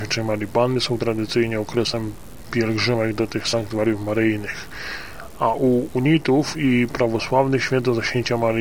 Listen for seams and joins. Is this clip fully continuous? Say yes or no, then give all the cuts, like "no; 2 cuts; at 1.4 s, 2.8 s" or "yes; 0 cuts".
yes; 0 cuts